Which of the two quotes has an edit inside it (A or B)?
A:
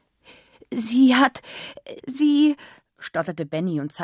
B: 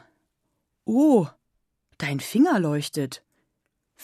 A